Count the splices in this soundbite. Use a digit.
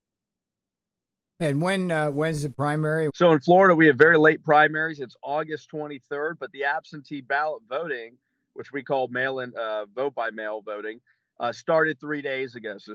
1